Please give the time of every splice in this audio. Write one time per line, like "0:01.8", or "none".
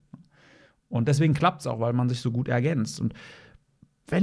none